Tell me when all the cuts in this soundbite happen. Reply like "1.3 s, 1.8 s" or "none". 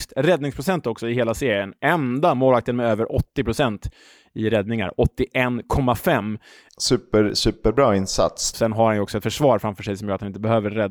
6.7 s, 8.5 s